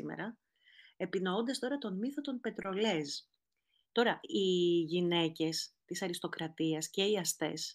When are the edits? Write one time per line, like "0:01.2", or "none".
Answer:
0:03.8